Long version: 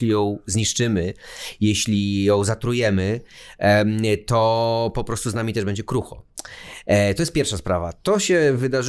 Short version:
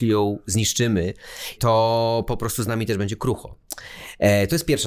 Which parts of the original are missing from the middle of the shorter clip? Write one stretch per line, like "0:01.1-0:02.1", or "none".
0:01.6-0:04.2

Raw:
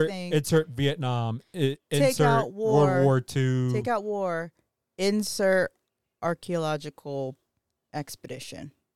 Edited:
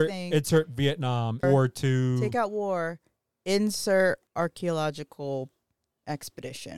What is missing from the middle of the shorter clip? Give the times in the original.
0:01.4-0:03.0
0:05.8-0:06.1

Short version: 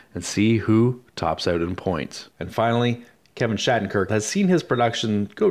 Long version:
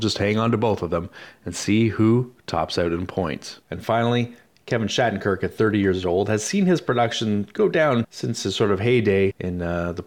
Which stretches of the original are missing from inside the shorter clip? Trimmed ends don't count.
0:05.4-0:06.3

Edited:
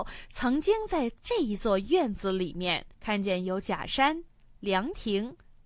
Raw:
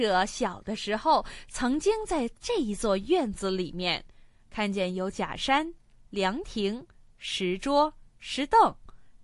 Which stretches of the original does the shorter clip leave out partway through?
0:04.1-0:04.4

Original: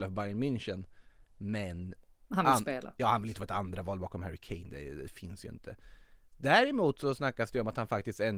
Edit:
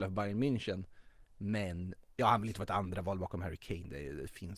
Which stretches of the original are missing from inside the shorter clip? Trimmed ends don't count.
0:02.1-0:03.0

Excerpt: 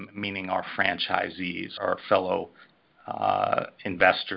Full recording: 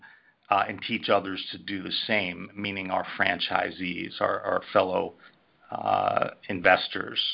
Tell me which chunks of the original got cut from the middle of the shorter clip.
0:04.2-0:04.4

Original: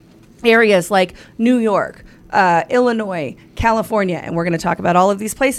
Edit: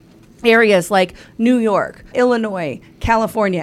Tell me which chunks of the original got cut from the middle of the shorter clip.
0:02.1-0:02.7

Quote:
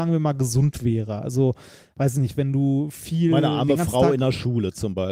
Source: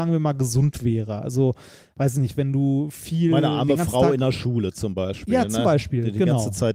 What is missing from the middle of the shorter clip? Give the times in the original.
none

